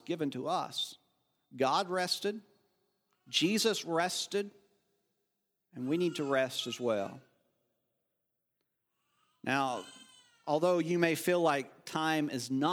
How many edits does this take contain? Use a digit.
0